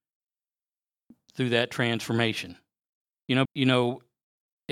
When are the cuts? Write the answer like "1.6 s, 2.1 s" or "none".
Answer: 3.5 s

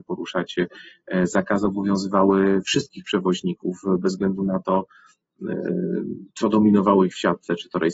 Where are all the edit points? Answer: 6.3 s

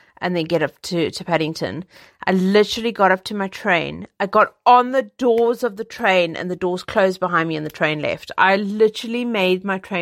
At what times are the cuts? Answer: none

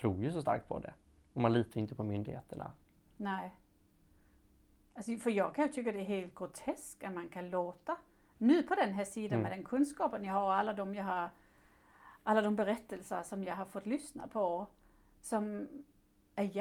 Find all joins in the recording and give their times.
none

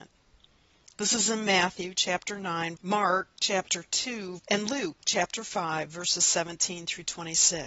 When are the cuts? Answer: 2.7 s, 4.4 s

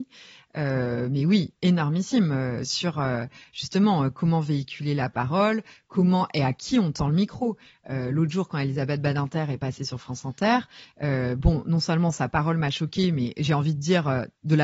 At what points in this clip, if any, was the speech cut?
none

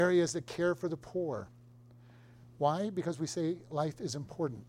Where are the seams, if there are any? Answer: none

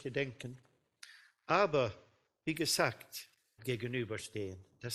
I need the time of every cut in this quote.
3.6 s

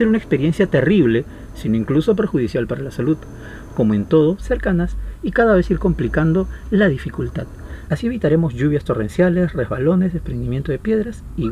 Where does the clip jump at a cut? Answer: 4.4 s, 7.9 s

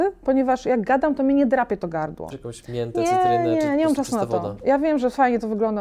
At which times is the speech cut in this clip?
2.3 s

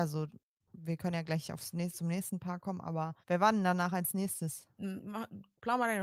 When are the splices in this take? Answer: 3.2 s, 4.8 s

